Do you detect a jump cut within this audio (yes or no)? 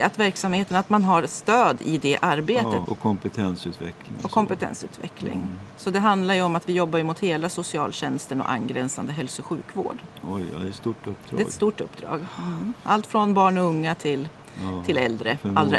yes